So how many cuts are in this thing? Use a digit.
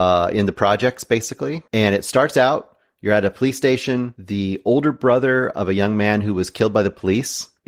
1